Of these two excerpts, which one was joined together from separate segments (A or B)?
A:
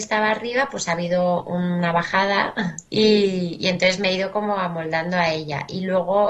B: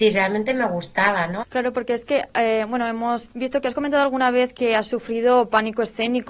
B